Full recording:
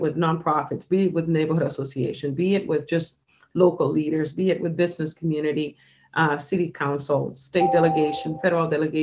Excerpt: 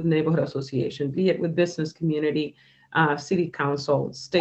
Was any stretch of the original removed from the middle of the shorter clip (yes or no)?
yes